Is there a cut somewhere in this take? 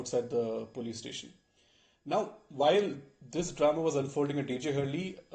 no; 0 cuts

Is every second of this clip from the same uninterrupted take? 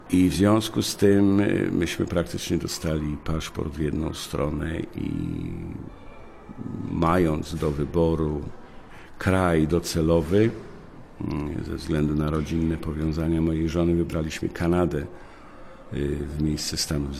yes; 0 cuts

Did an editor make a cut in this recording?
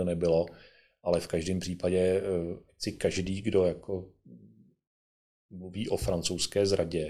no; 0 cuts

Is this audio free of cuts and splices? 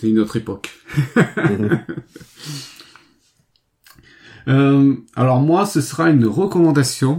yes; 0 cuts

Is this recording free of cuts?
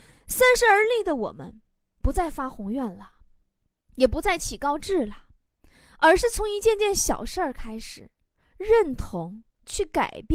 yes; 0 cuts

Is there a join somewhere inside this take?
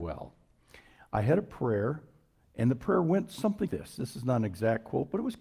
yes; 1 cut; at 3.7 s

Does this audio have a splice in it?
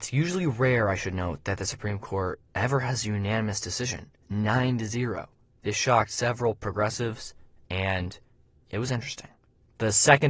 no; 0 cuts

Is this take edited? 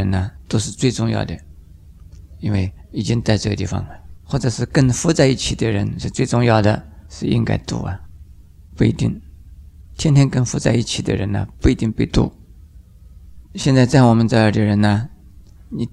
no; 0 cuts

